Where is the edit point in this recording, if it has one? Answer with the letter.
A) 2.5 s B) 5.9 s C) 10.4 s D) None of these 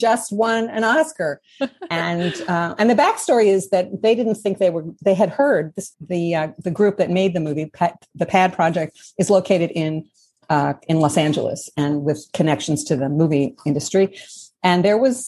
B